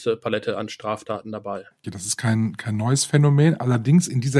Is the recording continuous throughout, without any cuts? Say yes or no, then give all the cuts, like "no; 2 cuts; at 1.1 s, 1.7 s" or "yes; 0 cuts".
no; 1 cut; at 1.8 s